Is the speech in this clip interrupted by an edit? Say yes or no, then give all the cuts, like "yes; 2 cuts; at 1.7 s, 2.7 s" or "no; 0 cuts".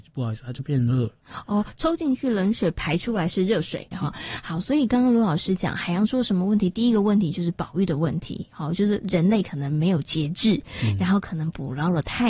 yes; 1 cut; at 3.9 s